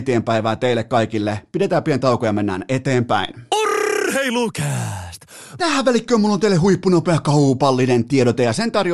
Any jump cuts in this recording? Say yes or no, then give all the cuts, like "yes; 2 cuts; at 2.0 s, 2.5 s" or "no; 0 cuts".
yes; 1 cut; at 5.6 s